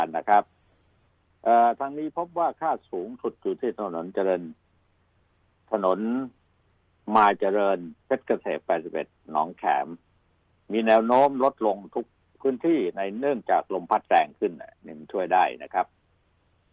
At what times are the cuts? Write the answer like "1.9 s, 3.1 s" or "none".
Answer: 8.0 s